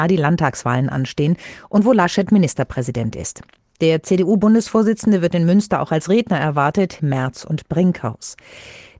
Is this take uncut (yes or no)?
no